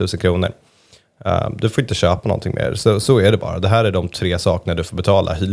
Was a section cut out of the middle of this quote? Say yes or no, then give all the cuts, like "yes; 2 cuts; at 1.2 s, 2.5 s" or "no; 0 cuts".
no; 0 cuts